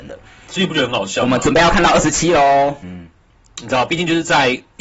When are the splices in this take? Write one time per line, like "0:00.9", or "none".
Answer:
0:02.8